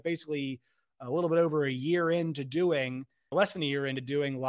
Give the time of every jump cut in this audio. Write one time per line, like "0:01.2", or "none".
0:03.3